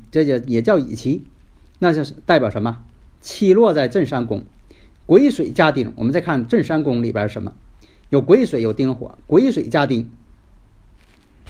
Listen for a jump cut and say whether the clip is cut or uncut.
uncut